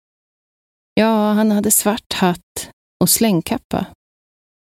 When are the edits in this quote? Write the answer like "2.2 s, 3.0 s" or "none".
none